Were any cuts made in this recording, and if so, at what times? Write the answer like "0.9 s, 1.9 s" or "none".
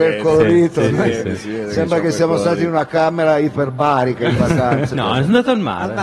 4.9 s